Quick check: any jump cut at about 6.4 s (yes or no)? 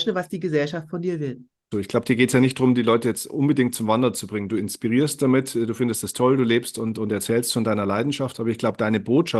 no